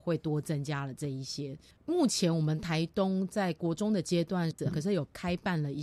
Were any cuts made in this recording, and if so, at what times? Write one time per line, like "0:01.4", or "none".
0:01.7
0:04.6